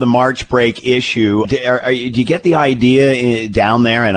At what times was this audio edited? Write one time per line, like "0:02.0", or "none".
0:01.4